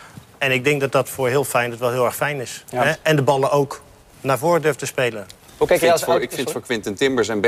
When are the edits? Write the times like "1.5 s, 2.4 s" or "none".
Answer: none